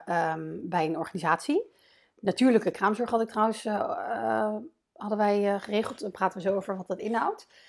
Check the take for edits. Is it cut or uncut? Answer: uncut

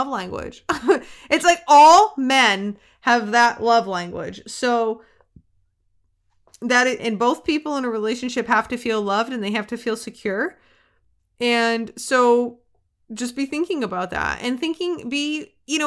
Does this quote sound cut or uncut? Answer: cut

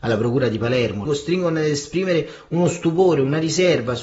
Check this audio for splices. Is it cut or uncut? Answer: cut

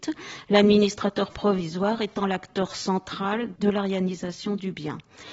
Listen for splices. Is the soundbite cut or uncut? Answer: cut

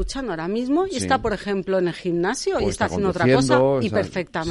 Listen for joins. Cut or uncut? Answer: uncut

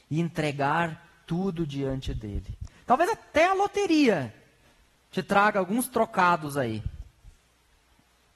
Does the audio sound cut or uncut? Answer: cut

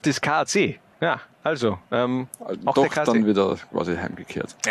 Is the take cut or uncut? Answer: cut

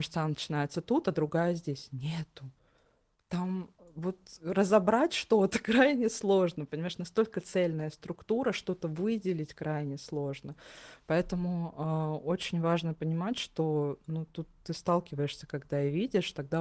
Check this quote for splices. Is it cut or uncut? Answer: uncut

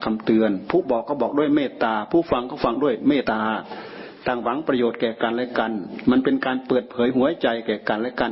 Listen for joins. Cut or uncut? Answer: cut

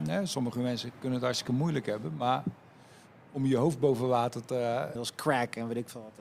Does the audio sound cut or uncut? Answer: cut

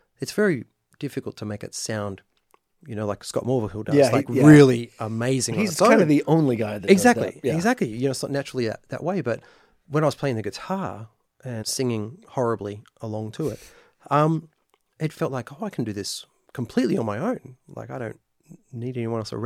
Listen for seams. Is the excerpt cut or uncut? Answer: cut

